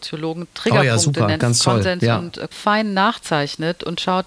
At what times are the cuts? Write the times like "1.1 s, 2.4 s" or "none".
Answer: 1.4 s, 2.5 s

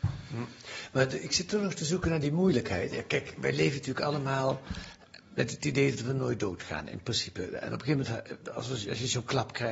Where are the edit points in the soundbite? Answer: none

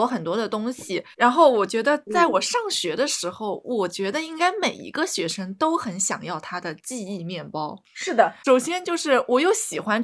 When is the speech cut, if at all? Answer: 1.1 s

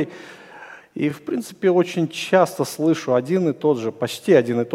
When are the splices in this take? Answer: none

